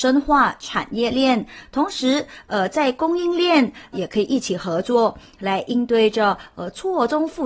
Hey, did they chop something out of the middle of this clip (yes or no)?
yes